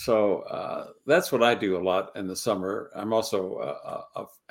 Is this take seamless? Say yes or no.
yes